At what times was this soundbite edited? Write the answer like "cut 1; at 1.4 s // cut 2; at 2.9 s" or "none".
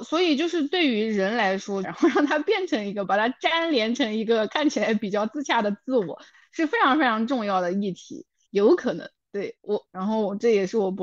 cut 1; at 1.8 s // cut 2; at 8.4 s // cut 3; at 9.8 s

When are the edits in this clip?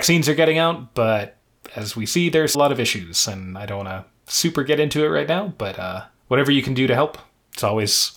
cut 1; at 2.5 s

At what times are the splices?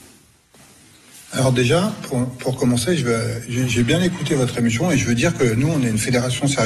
none

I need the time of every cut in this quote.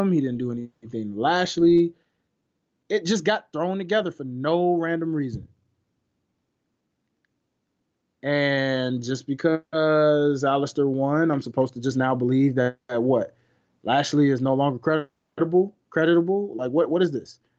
none

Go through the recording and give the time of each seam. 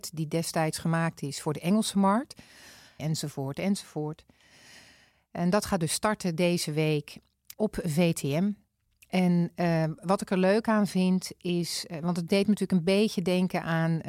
cut 1; at 3.0 s // cut 2; at 7.5 s

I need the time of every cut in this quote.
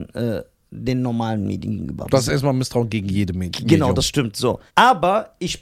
cut 1; at 4.7 s

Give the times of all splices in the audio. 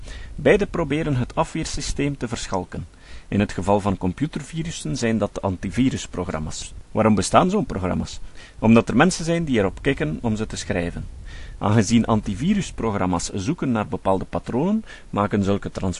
cut 1; at 6.8 s // cut 2; at 11.6 s

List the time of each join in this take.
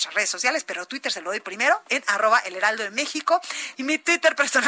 cut 1; at 3.7 s

